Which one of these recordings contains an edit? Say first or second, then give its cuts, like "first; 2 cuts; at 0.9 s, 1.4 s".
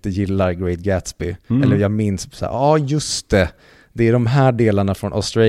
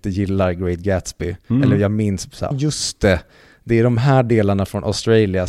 second; 1 cut; at 2.5 s